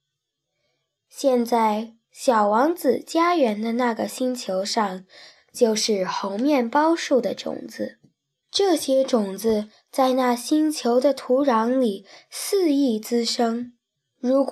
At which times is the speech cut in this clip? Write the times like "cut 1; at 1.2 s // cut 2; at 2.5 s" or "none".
cut 1; at 5.3 s